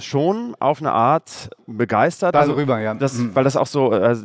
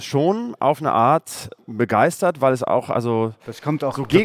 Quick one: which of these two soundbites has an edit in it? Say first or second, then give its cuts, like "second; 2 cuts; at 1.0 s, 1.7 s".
first; 1 cut; at 2.3 s